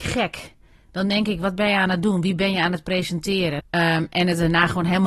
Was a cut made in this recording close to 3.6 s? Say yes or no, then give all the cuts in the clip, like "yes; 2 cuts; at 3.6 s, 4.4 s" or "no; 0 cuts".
yes; 1 cut; at 3.6 s